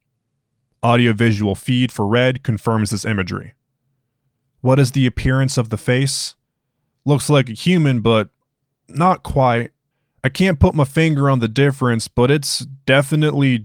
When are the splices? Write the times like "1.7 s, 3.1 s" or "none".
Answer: 7.0 s